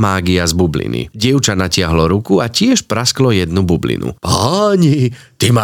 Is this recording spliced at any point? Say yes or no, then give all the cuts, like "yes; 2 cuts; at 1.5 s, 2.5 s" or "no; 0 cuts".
no; 0 cuts